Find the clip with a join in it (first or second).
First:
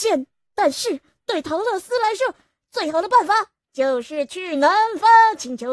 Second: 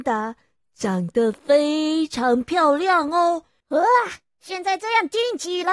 second